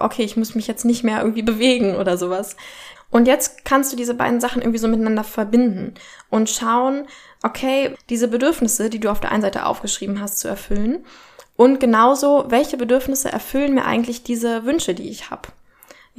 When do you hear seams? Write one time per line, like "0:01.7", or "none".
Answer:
0:02.9
0:07.9